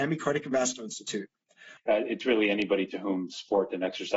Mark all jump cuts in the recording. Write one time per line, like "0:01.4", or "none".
0:01.8